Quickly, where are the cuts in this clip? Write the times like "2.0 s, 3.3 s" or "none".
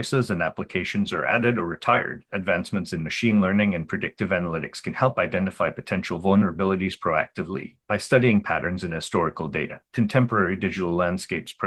2.3 s, 9.9 s